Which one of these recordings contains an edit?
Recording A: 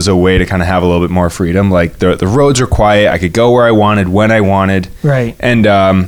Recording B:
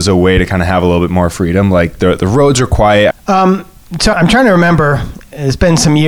B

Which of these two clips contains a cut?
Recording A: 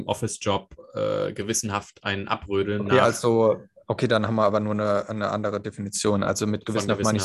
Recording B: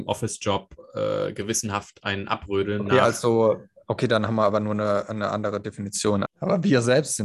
B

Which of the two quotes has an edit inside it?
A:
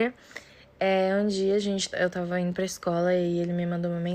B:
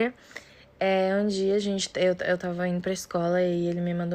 A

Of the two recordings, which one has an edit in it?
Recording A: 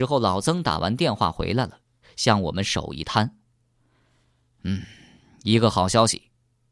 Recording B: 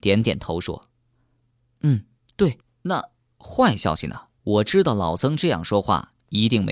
B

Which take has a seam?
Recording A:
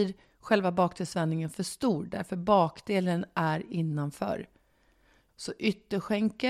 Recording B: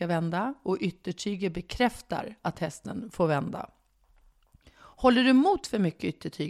A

